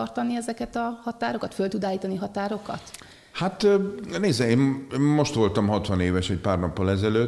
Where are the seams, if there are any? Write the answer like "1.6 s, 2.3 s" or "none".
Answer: none

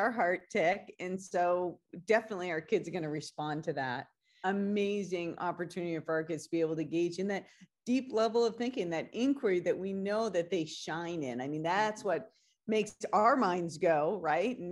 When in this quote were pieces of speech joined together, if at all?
4.4 s

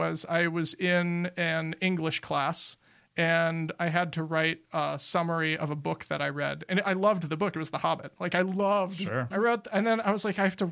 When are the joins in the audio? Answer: 9.3 s

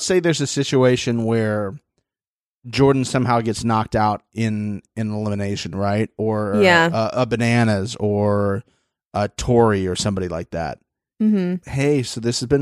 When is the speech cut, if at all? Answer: 11.6 s

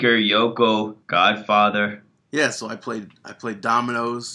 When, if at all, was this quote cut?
1.0 s, 2.2 s

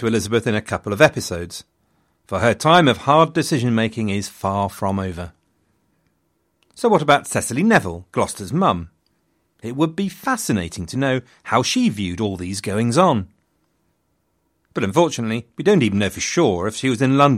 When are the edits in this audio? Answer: none

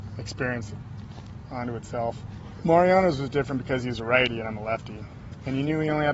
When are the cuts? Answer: 2.6 s

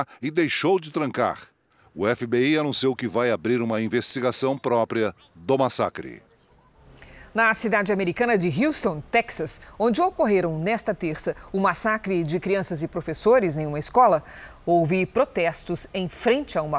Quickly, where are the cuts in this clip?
9.1 s

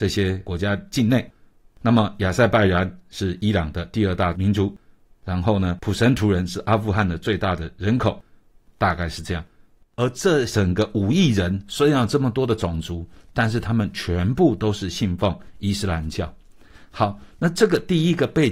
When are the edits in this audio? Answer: none

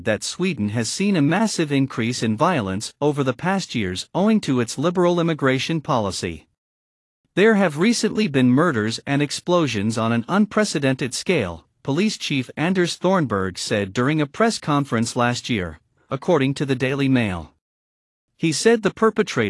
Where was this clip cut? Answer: none

